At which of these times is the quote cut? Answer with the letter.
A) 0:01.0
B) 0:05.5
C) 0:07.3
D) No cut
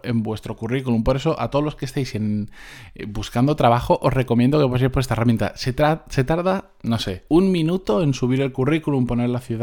C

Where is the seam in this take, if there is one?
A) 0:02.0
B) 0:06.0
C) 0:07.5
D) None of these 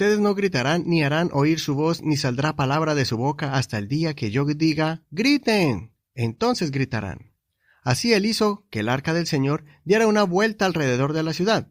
D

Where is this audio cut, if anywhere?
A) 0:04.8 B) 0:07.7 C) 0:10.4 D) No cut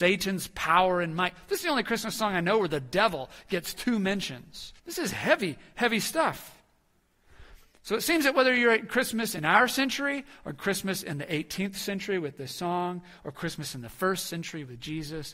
A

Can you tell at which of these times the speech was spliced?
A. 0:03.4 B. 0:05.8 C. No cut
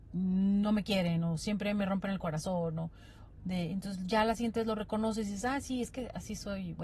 A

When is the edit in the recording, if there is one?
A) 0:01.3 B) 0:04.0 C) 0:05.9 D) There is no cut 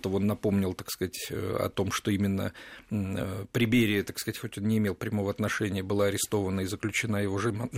D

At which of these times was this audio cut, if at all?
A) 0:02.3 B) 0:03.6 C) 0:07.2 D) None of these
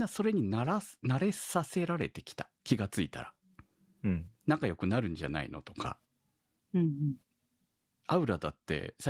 D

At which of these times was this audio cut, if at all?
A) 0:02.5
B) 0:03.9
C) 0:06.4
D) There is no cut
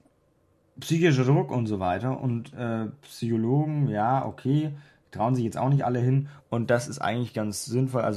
C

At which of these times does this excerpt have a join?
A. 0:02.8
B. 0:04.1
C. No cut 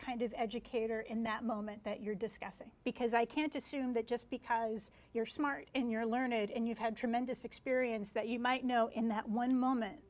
A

